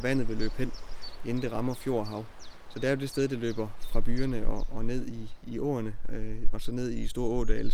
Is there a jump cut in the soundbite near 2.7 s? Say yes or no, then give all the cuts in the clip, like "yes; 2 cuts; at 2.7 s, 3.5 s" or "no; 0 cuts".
no; 2 cuts; at 5.4 s, 6.5 s